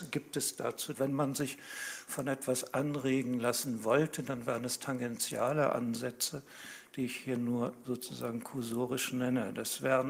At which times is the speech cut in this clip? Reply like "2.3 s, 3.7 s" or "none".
0.9 s